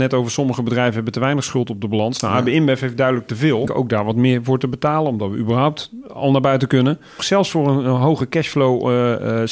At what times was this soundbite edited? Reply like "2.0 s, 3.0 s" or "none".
3.7 s, 7.2 s